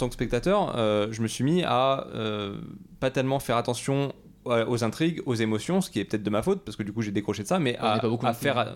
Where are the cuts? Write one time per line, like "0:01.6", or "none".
none